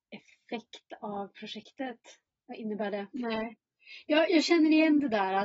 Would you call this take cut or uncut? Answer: cut